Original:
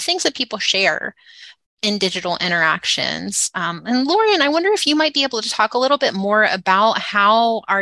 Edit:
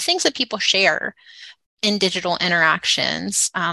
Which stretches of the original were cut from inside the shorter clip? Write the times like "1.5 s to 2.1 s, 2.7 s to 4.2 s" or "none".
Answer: none